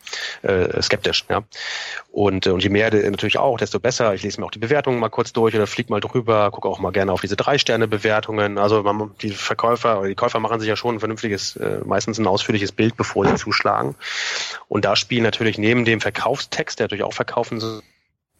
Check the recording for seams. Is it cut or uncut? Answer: uncut